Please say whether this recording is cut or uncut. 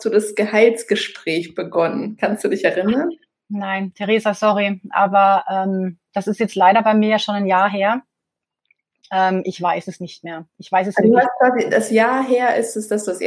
uncut